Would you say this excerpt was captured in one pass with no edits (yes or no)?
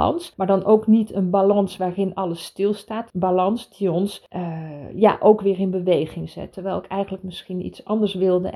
no